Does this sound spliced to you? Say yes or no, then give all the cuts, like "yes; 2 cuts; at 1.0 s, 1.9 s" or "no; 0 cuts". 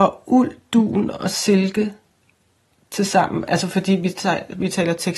no; 0 cuts